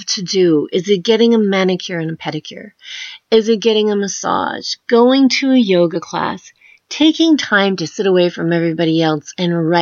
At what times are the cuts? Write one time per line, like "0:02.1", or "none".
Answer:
none